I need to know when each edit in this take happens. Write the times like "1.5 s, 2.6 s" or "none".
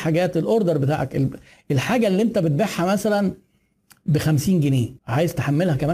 5.0 s